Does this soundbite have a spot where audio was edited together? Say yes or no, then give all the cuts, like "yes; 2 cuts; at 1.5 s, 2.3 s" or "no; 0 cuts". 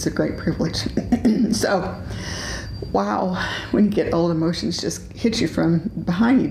no; 0 cuts